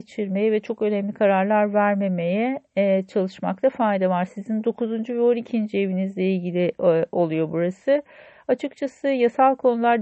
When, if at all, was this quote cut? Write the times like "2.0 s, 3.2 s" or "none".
none